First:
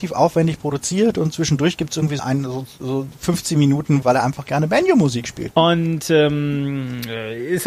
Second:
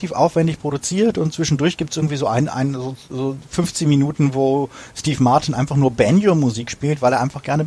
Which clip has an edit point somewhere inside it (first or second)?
first